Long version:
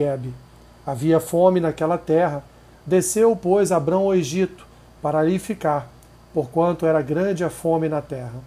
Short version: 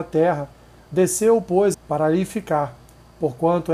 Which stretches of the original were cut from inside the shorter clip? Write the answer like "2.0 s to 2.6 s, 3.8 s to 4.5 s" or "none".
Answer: 3.7 s to 4.9 s